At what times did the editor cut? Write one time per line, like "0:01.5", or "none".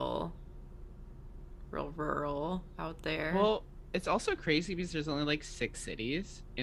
none